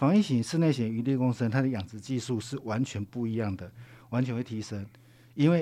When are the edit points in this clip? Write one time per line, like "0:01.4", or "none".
none